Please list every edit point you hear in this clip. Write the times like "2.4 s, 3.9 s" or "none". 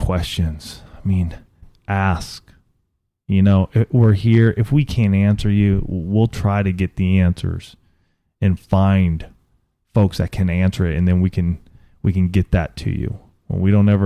none